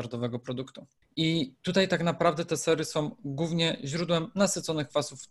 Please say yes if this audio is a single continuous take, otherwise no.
no